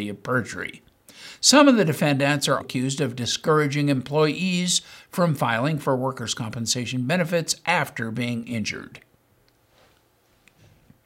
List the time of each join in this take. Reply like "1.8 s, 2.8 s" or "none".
2.6 s